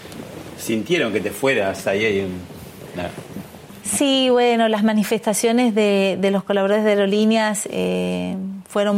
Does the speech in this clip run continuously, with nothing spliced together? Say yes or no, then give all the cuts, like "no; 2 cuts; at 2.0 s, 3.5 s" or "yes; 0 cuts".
yes; 0 cuts